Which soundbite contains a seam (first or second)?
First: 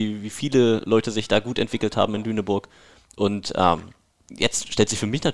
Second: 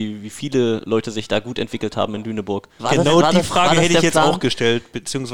second